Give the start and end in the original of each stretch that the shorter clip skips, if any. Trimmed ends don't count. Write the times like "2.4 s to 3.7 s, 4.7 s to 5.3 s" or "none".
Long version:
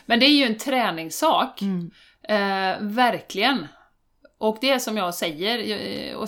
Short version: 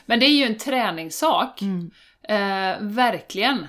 none